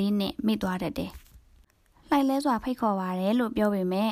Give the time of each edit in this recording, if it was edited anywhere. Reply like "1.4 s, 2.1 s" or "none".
none